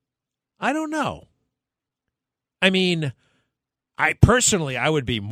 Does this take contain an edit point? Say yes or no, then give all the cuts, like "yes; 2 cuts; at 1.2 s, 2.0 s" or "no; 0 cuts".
no; 0 cuts